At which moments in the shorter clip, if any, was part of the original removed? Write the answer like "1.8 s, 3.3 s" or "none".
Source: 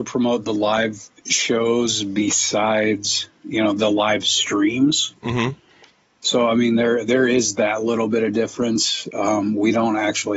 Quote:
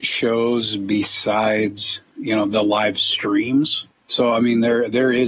3.9 s